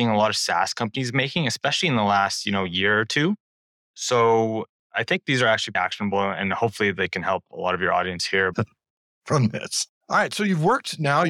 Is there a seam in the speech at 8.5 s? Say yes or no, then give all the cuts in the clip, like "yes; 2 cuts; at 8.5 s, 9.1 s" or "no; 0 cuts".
yes; 3 cuts; at 5.7 s, 8.5 s, 9.9 s